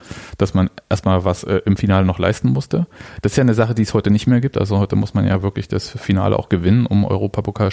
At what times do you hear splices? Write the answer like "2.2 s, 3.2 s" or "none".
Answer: none